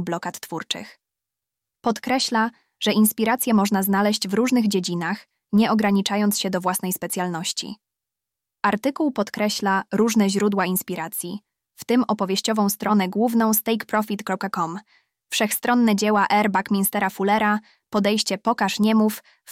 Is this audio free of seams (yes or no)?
yes